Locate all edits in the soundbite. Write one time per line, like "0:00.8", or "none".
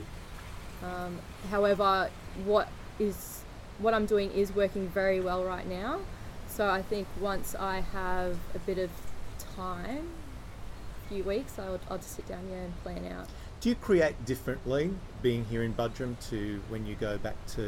0:12.0